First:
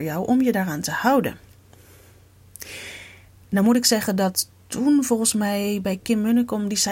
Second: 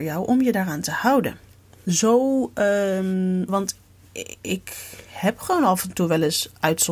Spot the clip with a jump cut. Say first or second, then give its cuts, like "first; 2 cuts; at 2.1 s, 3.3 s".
second; 2 cuts; at 1.8 s, 3.5 s